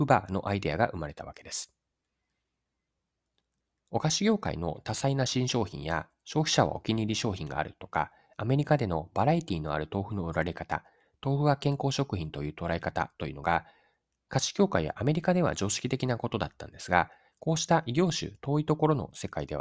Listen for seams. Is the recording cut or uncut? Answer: uncut